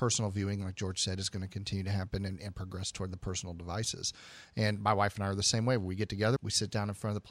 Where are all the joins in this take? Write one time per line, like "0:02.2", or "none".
0:06.4